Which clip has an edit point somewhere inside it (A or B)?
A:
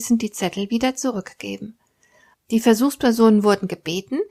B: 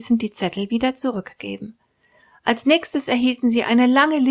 A